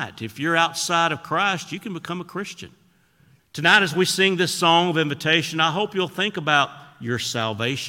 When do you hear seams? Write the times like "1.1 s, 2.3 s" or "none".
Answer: 3.4 s

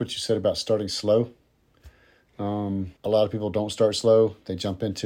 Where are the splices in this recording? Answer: 3.0 s

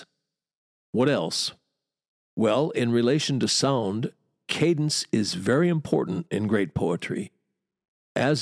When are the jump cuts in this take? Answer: none

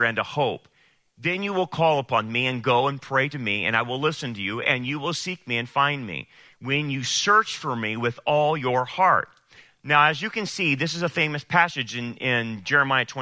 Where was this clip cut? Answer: none

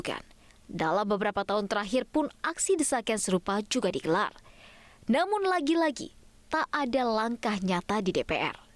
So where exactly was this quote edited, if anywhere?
none

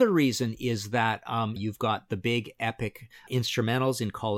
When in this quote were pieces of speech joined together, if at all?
1.6 s, 3.3 s

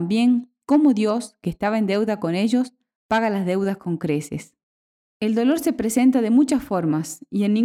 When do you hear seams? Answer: 5.0 s

